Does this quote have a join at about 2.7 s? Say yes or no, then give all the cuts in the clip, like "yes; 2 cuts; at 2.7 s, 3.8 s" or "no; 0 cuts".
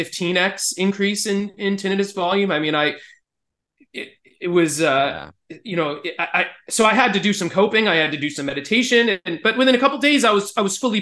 no; 0 cuts